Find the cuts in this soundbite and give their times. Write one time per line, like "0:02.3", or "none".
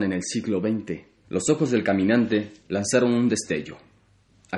0:01.2
0:02.6

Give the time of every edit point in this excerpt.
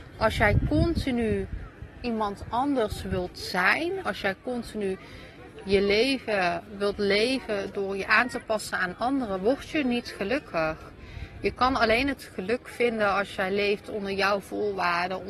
0:04.0

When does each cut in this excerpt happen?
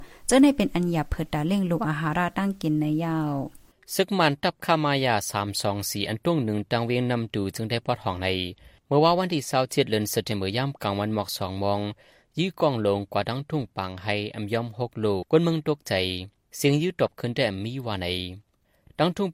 0:15.2

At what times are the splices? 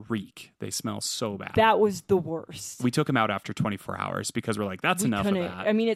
none

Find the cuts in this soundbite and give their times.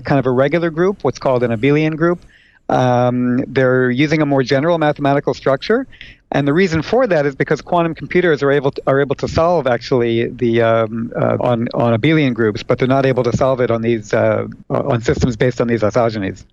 0:11.4

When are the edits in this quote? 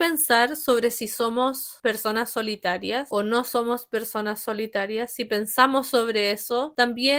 none

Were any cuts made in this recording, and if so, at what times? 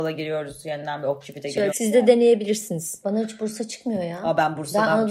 0:01.7
0:03.0

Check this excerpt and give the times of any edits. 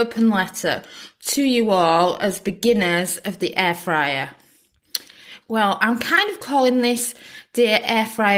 0:05.4

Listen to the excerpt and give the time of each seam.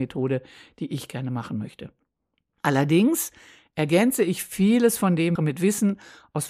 0:05.4

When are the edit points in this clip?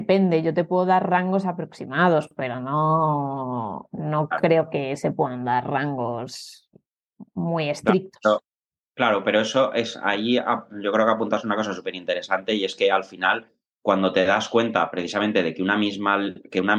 none

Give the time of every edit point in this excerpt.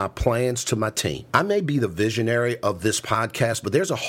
0:01.3

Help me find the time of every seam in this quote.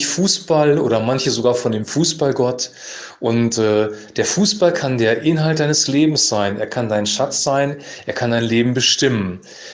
none

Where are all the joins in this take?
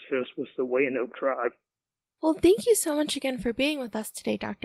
0:02.1

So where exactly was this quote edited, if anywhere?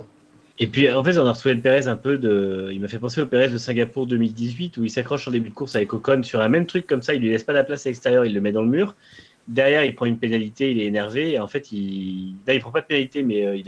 none

